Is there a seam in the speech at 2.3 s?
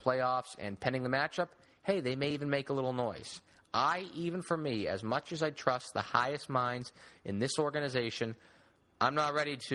no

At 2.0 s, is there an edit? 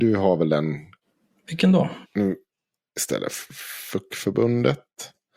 yes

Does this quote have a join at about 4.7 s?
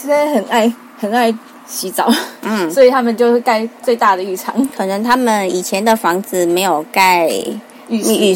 no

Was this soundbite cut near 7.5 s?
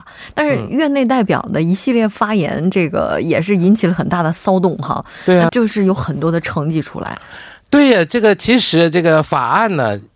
no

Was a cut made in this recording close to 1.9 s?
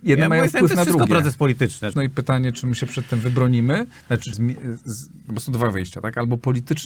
yes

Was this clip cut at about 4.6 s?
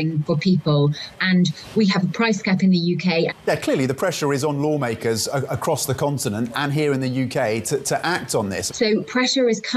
no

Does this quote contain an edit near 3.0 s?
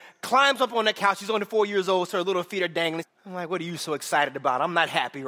yes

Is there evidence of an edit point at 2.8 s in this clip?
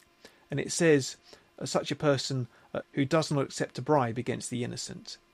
yes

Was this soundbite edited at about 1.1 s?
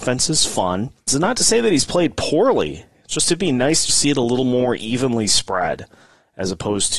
yes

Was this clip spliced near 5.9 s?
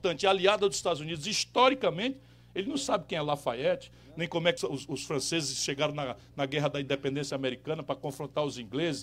no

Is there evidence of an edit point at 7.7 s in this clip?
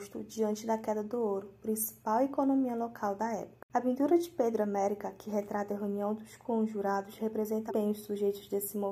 yes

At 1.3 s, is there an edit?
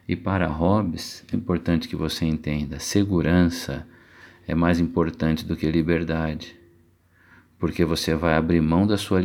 yes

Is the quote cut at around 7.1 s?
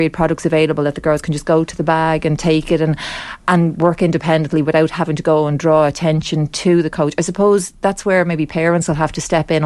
no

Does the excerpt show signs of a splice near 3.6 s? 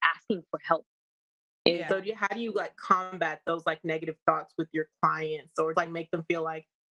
no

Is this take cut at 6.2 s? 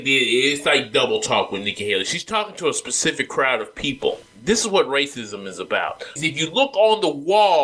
yes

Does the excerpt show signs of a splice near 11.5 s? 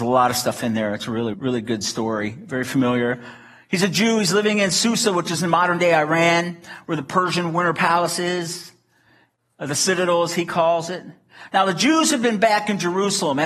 no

